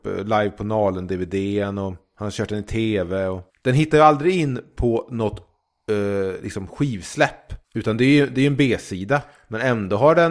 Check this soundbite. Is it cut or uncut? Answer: cut